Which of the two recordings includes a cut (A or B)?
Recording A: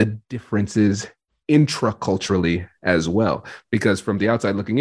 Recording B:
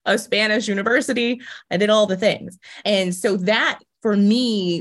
B